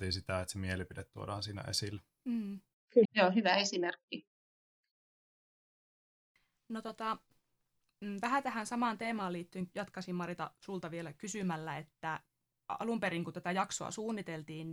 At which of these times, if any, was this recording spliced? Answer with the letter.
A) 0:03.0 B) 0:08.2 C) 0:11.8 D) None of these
A